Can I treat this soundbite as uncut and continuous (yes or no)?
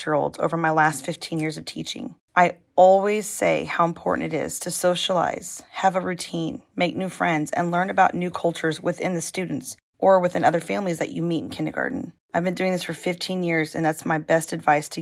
yes